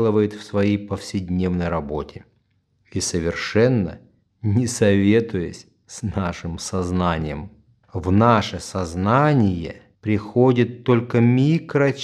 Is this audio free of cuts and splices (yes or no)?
no